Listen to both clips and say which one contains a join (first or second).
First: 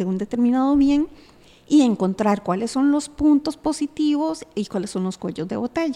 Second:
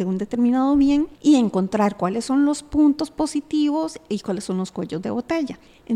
second